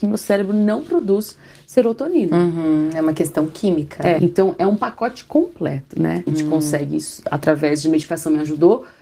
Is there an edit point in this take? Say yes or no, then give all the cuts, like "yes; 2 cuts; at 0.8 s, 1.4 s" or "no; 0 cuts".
yes; 2 cuts; at 4.2 s, 6.3 s